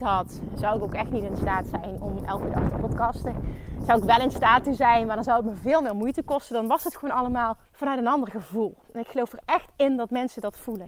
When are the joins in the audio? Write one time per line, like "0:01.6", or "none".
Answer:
0:07.7